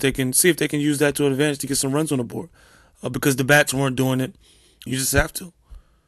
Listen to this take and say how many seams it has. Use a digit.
1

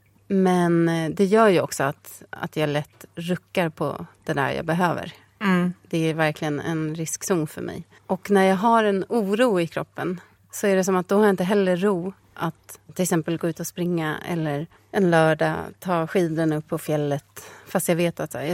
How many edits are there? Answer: 1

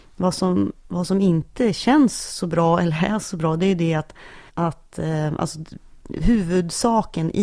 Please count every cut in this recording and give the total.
1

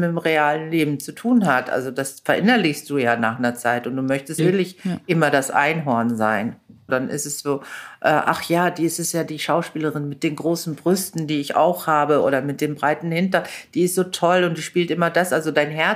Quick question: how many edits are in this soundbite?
2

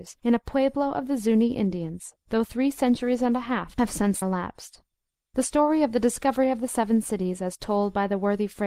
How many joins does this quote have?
1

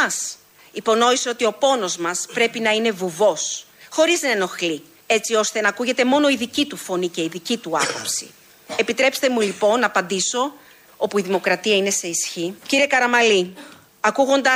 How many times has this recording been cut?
2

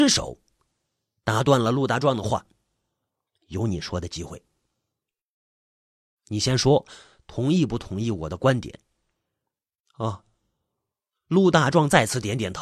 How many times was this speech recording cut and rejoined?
0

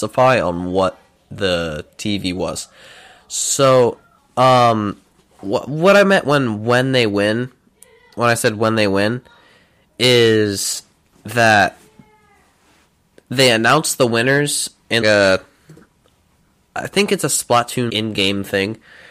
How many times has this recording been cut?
2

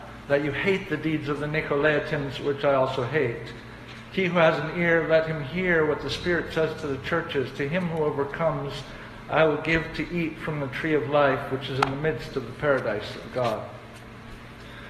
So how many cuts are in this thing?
0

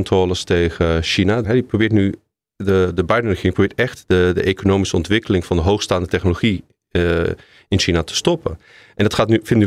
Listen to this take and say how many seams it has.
1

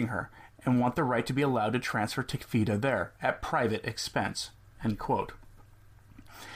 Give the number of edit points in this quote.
0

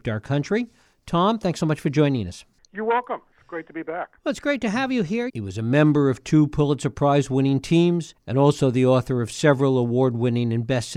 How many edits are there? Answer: 1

